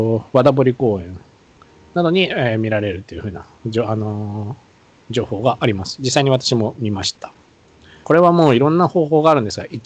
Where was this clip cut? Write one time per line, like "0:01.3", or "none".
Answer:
0:08.0